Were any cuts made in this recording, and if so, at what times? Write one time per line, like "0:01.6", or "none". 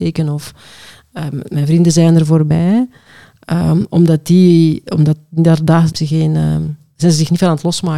0:05.9